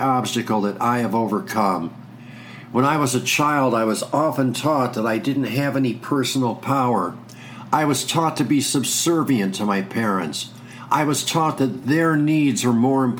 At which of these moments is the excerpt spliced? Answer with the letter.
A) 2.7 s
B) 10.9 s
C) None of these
C